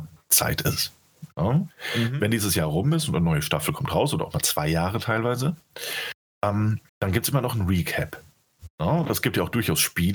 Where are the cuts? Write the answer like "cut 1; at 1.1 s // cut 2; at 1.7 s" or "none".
cut 1; at 6.9 s